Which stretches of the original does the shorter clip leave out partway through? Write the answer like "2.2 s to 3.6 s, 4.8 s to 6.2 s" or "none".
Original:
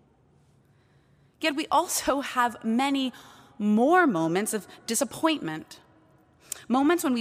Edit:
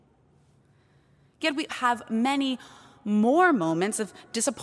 1.7 s to 2.2 s